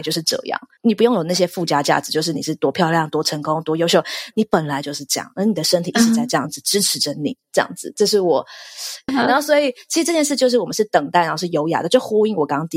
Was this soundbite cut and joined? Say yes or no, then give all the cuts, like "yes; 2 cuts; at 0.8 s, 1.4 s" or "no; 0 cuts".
yes; 1 cut; at 9.1 s